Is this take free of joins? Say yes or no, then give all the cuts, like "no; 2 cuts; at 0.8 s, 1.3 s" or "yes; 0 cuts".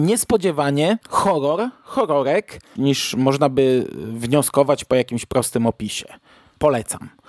no; 2 cuts; at 1.0 s, 2.8 s